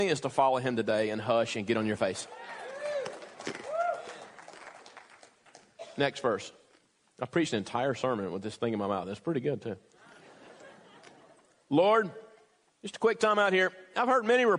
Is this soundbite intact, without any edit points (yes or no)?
no